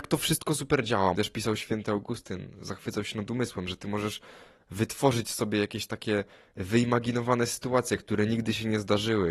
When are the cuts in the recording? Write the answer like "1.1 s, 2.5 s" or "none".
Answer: 1.1 s